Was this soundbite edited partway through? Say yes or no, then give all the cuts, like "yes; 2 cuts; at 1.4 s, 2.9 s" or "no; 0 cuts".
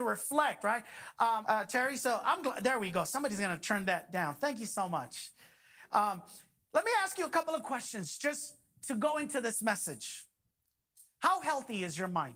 yes; 1 cut; at 1.4 s